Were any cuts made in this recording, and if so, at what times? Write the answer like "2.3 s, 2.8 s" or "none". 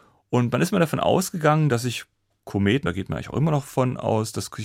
none

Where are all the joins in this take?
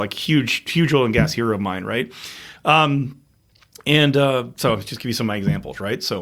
none

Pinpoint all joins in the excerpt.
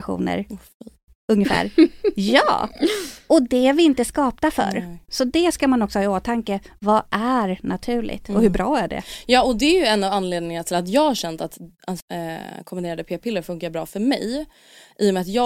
12.0 s

